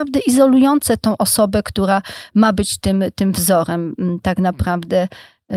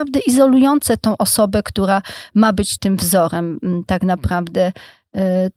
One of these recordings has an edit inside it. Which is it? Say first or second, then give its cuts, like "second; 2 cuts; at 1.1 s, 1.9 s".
second; 1 cut; at 2.8 s